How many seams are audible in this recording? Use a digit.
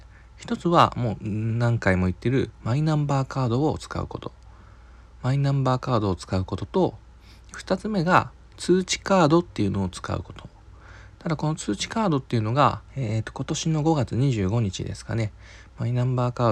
2